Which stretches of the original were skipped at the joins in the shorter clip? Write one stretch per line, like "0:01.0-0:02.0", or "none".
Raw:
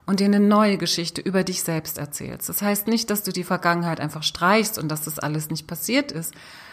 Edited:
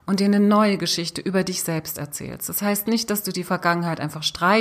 none

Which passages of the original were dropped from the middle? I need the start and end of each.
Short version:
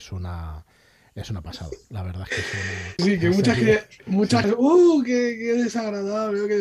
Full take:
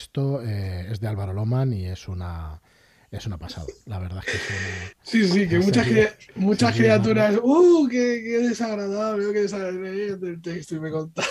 0:04.9-0:05.3
0:06.7-0:07.3

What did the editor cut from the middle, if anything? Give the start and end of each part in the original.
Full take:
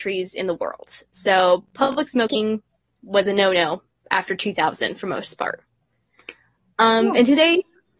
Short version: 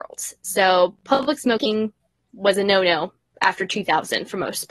none

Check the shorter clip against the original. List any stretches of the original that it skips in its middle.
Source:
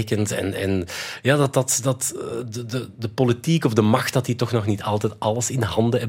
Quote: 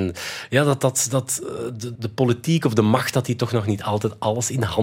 0:02.7-0:02.9

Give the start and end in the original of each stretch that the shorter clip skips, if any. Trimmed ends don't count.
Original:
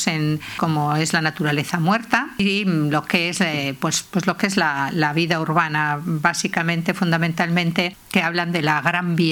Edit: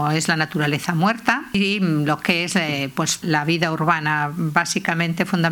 0:04.1-0:04.9

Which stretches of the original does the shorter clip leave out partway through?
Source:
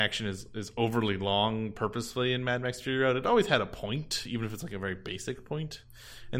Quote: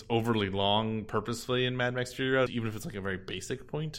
0:03.1-0:04.2

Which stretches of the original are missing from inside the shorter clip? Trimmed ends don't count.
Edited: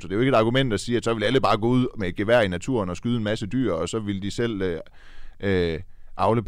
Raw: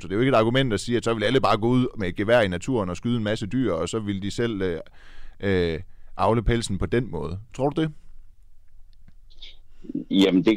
none

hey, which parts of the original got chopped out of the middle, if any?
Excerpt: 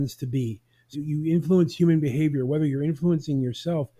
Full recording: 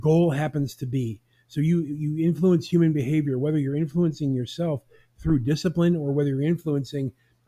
0:01.5-0:01.9

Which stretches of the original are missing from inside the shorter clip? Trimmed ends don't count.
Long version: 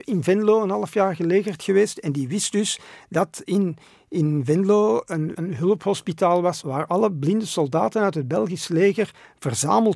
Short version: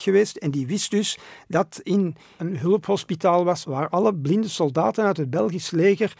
0:04.0-0:05.4

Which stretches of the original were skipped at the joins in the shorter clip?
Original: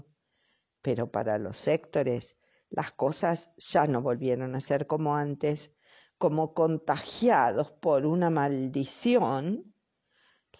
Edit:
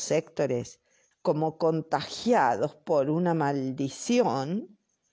0:02.7-0:06.1

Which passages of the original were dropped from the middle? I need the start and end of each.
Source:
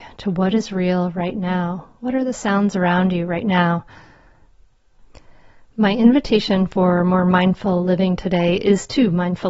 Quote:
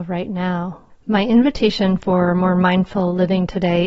0:02.0-0:05.6

